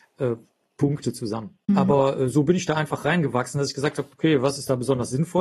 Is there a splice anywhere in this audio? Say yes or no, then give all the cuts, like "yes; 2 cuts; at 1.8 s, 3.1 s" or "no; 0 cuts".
yes; 1 cut; at 1.7 s